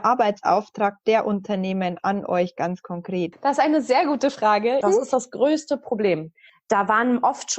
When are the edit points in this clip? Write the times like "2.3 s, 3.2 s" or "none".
3.3 s, 4.8 s, 6.5 s